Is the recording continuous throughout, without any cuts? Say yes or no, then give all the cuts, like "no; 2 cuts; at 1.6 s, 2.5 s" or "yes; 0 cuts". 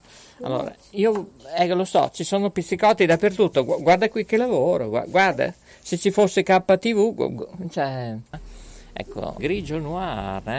no; 2 cuts; at 8.3 s, 9.4 s